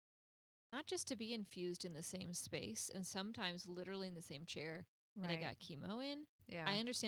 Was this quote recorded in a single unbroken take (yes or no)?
yes